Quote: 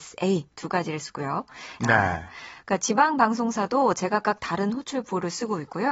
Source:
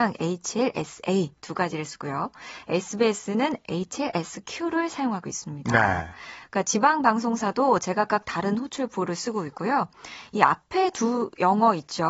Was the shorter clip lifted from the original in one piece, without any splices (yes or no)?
no